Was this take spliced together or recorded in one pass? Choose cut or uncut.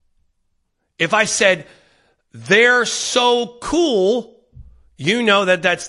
uncut